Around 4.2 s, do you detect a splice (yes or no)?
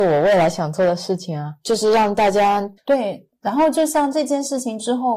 no